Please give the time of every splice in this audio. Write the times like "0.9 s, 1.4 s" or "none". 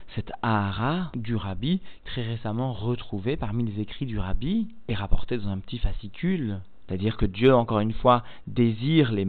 6.8 s